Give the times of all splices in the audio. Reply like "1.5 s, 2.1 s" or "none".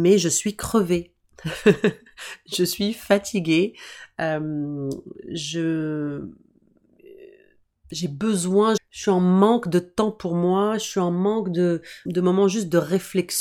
8.8 s, 12.1 s